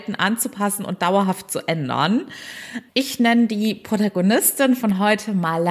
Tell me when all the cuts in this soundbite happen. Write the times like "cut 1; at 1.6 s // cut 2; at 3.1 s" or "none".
cut 1; at 2.9 s